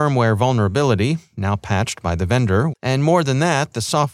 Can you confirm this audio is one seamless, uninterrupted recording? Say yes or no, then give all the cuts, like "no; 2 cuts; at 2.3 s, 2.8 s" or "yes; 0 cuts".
no; 1 cut; at 2.7 s